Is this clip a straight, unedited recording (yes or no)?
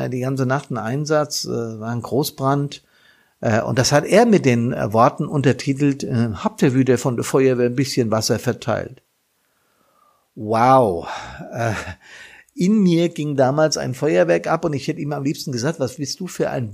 yes